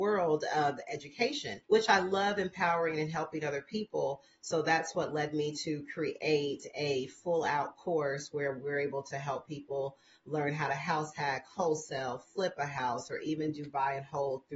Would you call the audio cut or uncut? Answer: uncut